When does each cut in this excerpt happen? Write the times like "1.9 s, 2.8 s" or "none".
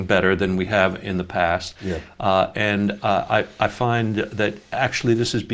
none